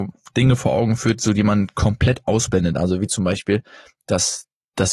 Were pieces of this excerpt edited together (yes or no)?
no